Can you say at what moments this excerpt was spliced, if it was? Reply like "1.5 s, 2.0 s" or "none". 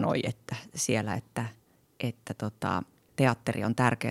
3.1 s